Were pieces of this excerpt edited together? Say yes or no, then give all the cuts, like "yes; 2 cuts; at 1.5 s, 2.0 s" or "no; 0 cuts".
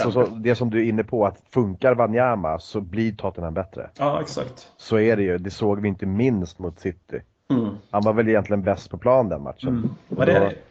no; 0 cuts